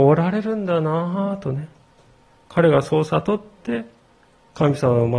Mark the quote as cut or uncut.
uncut